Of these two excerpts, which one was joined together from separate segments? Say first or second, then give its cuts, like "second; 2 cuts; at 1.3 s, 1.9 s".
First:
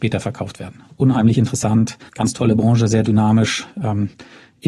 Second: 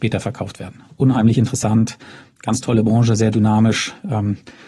first; 1 cut; at 2.1 s